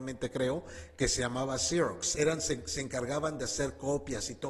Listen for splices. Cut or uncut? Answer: cut